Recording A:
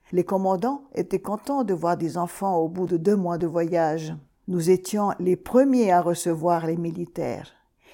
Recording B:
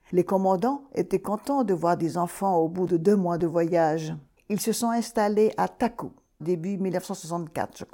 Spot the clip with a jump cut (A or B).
B